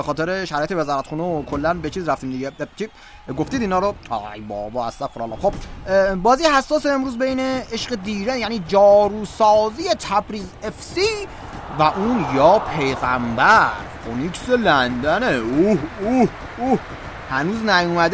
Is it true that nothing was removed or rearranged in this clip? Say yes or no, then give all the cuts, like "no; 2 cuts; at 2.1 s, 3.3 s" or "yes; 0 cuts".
yes; 0 cuts